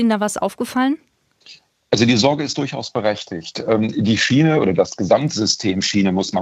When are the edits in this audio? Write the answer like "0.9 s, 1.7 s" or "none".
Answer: none

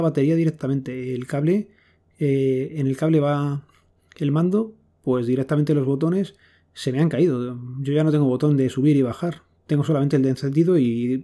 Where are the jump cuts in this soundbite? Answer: none

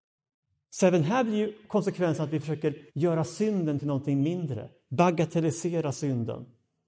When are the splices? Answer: 2.9 s

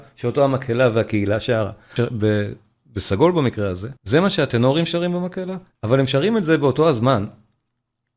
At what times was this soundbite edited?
2.0 s, 4.0 s, 5.7 s

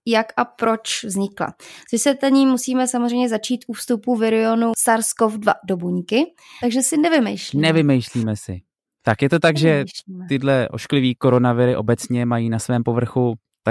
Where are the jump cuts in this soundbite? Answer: 6.6 s

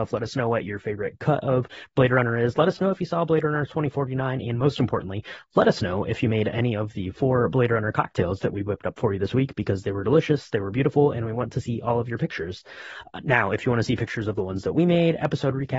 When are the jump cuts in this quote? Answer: none

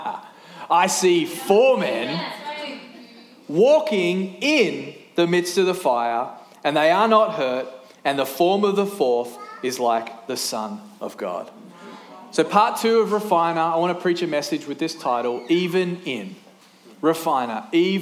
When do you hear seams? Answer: none

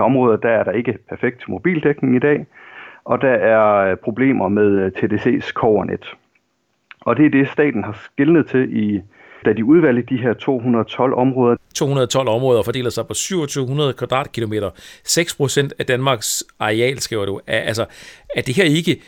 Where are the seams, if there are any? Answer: 9.4 s, 11.6 s

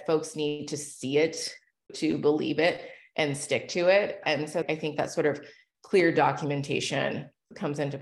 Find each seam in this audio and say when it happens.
none

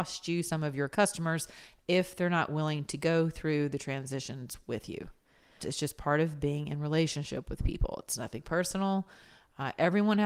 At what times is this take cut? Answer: 5.6 s

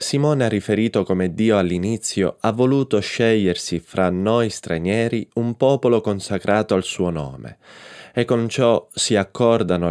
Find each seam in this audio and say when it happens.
none

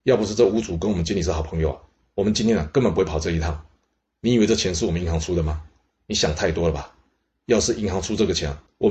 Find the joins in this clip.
none

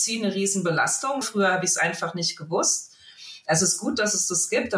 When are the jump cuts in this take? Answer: 1.2 s

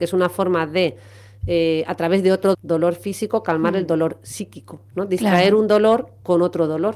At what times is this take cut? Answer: 2.5 s

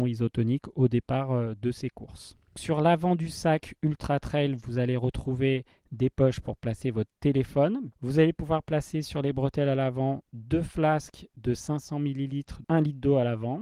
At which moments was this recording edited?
7.9 s, 12.6 s

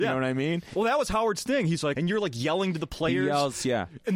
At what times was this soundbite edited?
1.9 s

